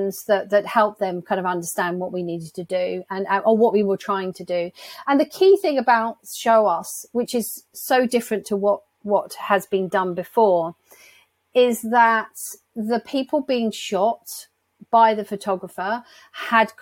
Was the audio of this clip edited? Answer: no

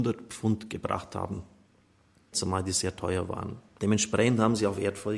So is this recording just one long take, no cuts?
no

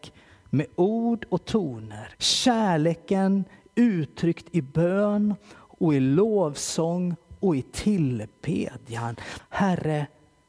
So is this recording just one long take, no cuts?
no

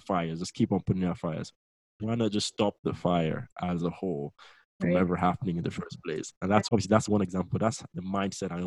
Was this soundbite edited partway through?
yes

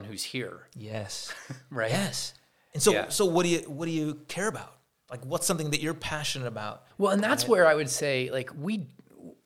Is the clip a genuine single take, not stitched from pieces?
no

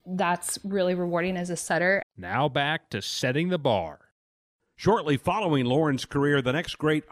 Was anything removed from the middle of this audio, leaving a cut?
yes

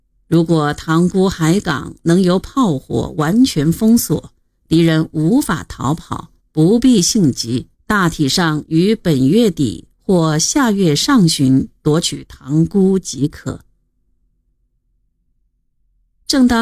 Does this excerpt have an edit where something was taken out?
yes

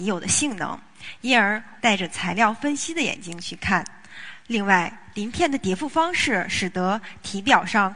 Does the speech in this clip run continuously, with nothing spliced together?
no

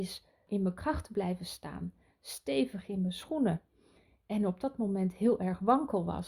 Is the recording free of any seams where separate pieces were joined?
yes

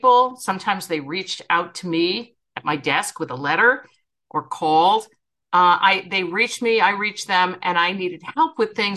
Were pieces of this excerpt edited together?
no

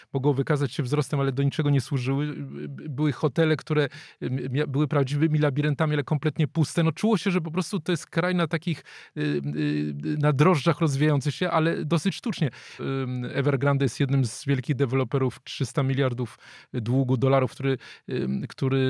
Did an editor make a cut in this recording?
yes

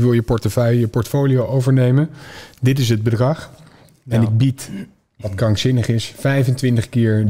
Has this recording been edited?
no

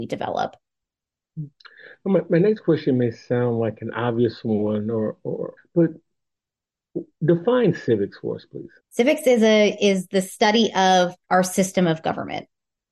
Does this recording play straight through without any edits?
no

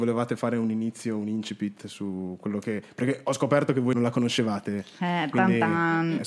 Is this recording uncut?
no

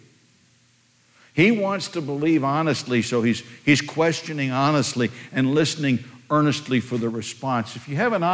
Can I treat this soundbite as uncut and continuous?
yes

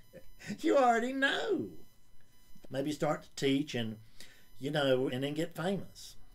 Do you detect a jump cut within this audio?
yes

